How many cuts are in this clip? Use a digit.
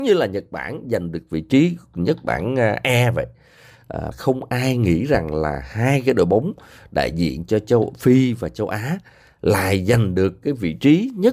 1